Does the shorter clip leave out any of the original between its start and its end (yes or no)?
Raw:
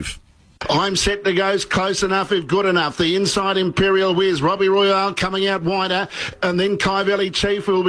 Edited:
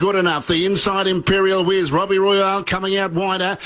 no